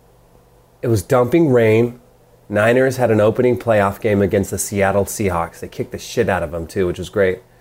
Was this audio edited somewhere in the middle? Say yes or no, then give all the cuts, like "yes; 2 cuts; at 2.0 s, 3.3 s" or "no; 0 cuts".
no; 0 cuts